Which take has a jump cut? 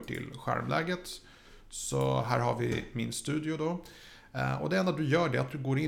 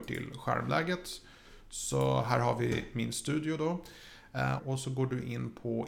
second; 1 cut; at 4.6 s

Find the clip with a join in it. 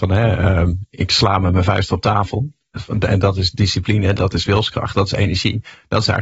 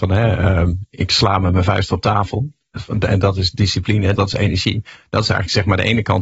second; 1 cut; at 4.2 s

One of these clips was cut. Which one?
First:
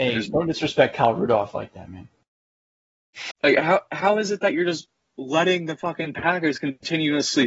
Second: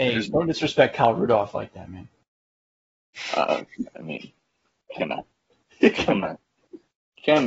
first; 1 cut; at 3.3 s

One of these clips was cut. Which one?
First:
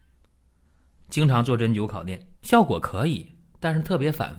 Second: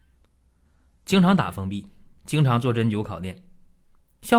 first; 2 cuts; at 1.0 s, 2.3 s

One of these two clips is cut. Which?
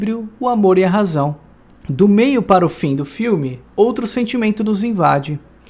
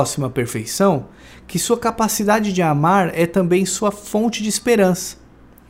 first; 2 cuts; at 1.7 s, 3.7 s

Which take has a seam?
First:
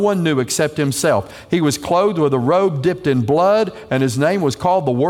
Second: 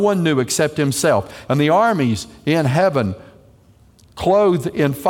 second; 1 cut; at 1.5 s

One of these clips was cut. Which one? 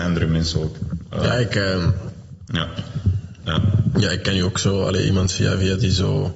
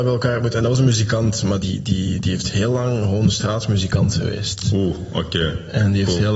second; 1 cut; at 1.6 s

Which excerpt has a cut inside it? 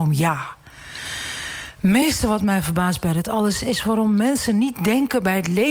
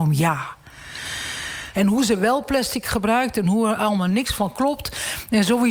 second; 1 cut; at 1.7 s

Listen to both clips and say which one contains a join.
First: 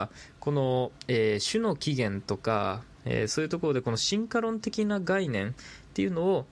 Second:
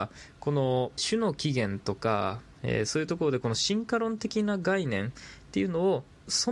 second; 1 cut; at 1.0 s

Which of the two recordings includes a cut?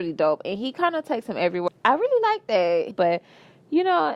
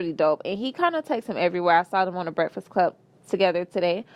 first; 2 cuts; at 1.7 s, 2.9 s

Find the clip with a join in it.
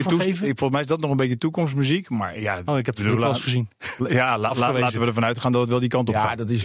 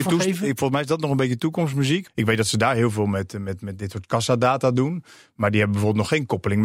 second; 1 cut; at 2.1 s

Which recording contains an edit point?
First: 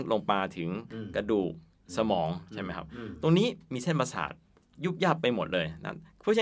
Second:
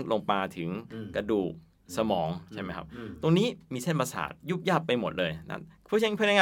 second; 1 cut; at 4.4 s

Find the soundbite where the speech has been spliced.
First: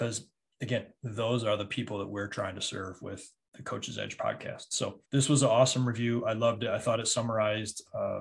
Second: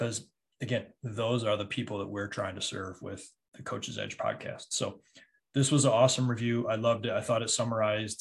first; 1 cut; at 5.0 s

